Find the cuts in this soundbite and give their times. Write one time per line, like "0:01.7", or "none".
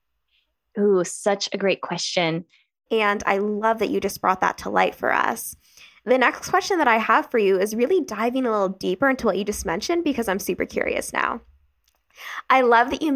0:02.9